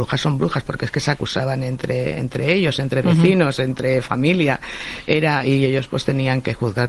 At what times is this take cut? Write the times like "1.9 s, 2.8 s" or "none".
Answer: none